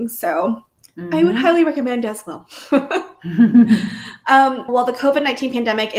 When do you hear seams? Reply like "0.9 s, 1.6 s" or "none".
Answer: 4.7 s